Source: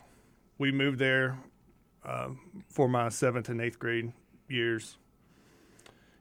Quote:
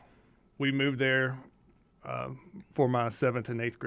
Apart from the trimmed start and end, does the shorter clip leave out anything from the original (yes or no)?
no